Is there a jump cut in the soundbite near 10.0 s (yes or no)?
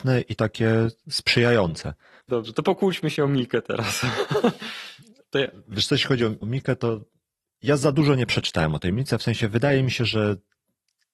no